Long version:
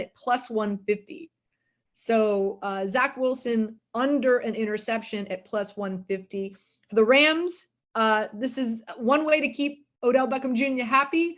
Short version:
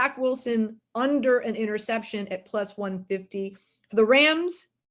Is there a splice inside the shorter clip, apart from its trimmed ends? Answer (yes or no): no